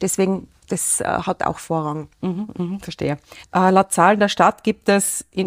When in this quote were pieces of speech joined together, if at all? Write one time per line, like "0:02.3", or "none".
0:03.4